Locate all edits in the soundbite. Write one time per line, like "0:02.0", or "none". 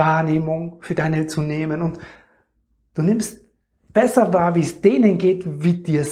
none

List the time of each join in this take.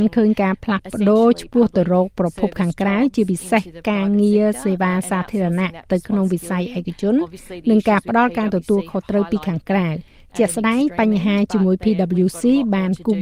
none

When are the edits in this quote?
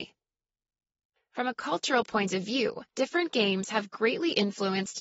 0:01.2
0:02.9

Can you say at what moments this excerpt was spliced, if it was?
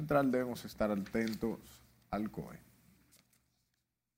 none

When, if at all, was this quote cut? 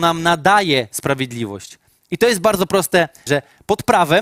0:03.3

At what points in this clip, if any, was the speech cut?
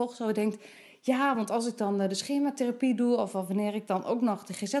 none

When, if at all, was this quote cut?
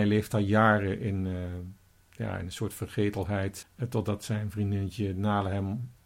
0:03.6

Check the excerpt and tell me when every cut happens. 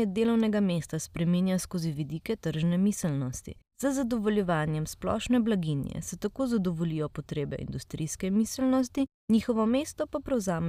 0:03.6

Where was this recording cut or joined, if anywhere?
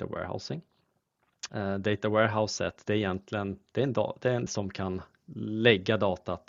0:01.5
0:04.5

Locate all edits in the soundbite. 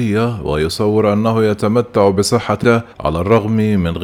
0:02.9

